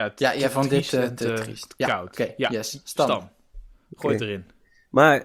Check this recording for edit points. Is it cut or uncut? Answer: uncut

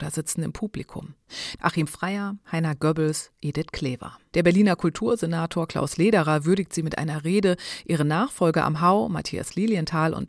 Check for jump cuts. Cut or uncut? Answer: uncut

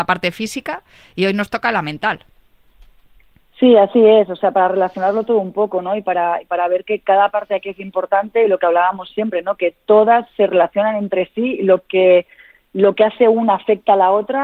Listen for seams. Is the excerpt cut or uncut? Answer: uncut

